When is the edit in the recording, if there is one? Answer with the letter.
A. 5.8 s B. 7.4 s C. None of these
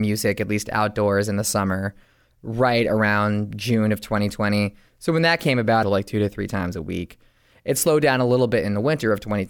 A